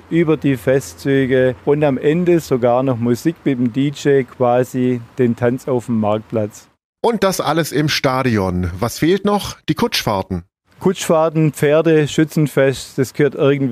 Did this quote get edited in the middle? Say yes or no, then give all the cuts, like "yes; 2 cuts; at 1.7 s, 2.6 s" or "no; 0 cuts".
no; 0 cuts